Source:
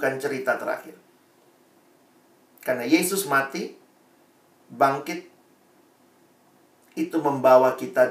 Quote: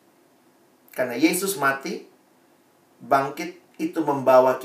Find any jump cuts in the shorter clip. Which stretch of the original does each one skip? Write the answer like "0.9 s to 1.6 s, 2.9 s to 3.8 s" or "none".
5.4 s to 6.9 s